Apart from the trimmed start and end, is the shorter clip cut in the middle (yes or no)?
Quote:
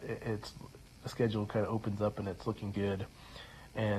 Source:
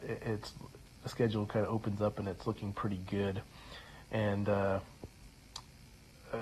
yes